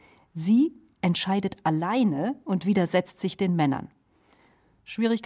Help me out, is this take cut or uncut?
uncut